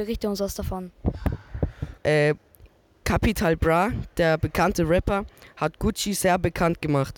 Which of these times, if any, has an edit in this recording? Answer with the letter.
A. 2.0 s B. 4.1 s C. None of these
A